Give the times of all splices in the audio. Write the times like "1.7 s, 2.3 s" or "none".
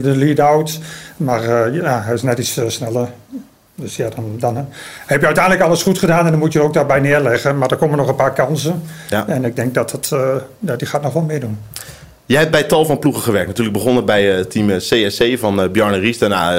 none